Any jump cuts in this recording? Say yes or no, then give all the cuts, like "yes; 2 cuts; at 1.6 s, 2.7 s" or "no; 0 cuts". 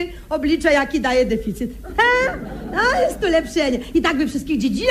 no; 0 cuts